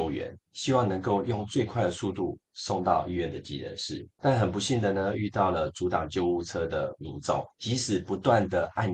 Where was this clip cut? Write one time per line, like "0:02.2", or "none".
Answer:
none

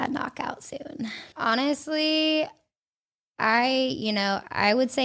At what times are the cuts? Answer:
0:01.3

